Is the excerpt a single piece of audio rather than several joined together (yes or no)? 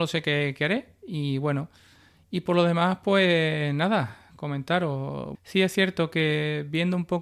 no